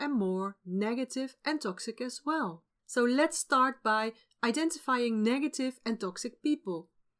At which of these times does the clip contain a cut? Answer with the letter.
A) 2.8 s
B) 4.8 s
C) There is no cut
A